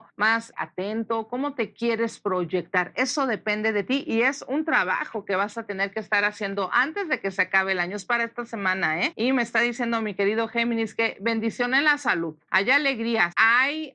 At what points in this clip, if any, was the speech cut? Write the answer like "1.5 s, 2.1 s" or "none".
none